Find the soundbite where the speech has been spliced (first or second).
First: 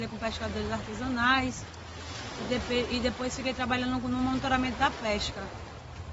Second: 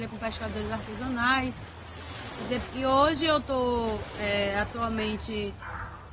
second